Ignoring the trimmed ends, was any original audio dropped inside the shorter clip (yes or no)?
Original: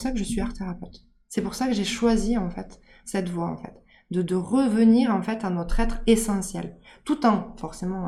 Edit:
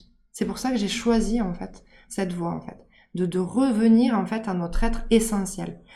no